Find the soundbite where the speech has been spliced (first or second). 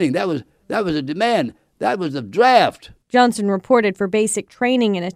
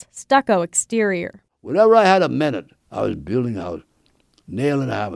second